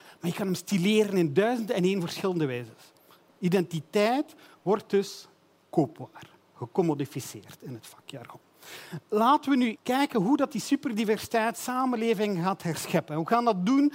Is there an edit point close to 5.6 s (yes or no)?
no